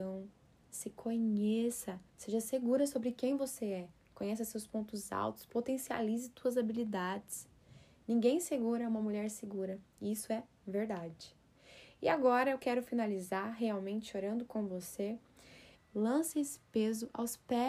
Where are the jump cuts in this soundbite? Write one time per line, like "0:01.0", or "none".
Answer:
0:02.1
0:15.7